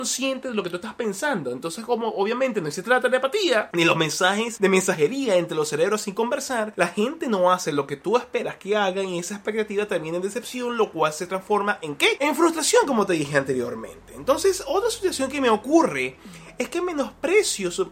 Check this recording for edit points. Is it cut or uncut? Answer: uncut